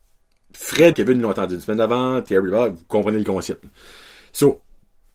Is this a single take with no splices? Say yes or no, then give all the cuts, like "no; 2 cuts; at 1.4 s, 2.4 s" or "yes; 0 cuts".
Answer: no; 1 cut; at 0.9 s